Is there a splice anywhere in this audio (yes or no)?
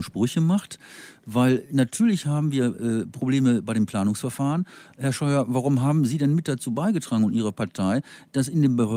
no